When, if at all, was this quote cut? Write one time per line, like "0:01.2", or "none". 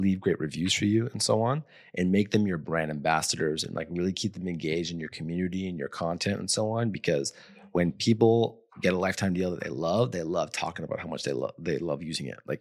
none